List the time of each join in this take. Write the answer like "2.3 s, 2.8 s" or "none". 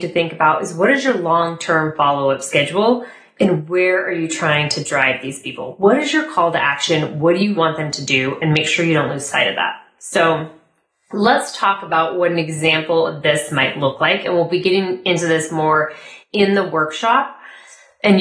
7.6 s